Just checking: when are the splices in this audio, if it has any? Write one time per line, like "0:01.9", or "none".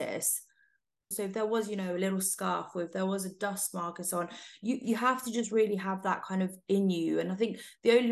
0:01.1